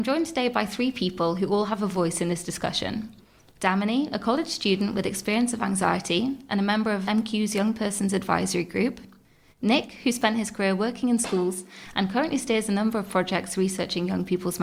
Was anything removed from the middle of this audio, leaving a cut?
no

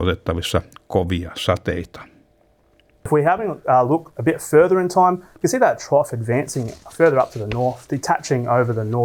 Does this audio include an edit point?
no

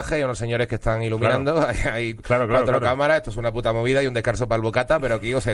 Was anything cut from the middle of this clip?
no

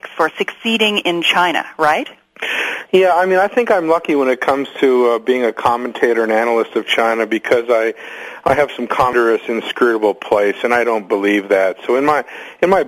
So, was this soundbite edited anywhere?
no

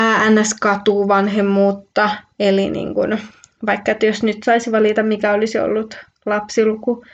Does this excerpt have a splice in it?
no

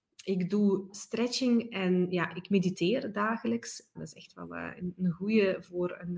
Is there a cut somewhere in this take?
yes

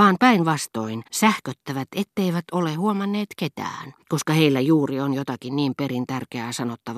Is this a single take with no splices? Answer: no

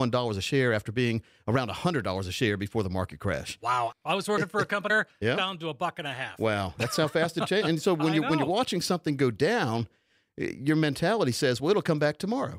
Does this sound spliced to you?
yes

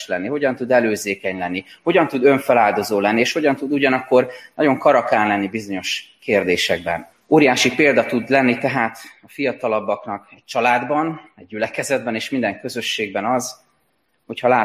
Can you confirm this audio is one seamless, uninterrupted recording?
no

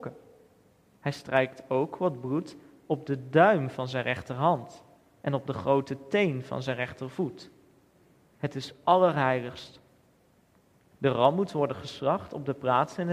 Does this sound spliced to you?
yes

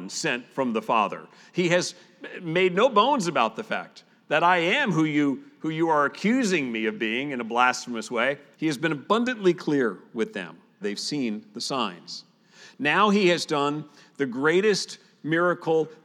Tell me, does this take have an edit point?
yes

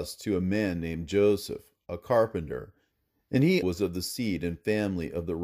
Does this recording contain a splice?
yes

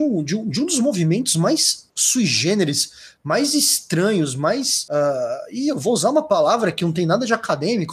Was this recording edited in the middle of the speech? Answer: no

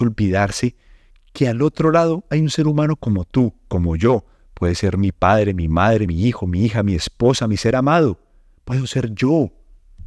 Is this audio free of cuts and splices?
no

